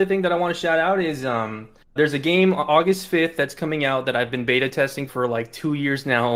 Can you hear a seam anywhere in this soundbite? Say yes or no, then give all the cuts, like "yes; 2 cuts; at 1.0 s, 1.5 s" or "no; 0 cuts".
yes; 2 cuts; at 2.0 s, 5.1 s